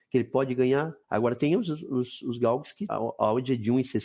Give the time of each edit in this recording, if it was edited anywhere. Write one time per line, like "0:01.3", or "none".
0:01.0
0:02.9